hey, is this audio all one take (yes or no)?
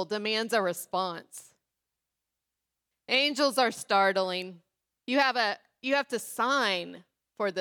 no